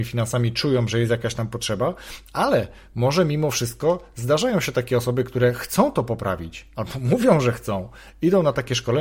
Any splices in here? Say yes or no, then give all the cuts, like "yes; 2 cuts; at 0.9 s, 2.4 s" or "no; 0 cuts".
yes; 1 cut; at 6.7 s